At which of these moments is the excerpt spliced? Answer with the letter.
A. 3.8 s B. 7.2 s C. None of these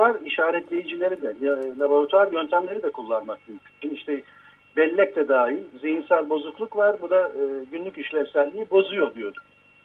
A